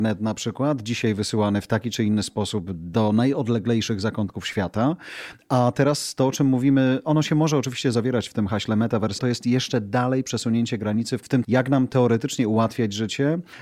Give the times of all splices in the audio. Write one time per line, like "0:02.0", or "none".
0:09.2
0:11.4